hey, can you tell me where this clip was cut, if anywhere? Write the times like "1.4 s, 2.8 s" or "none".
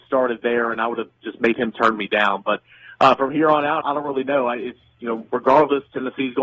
3.8 s